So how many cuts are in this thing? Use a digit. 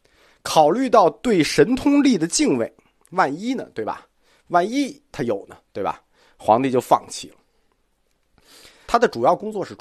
1